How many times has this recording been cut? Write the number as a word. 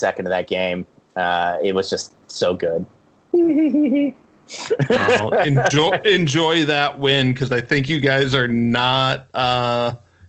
zero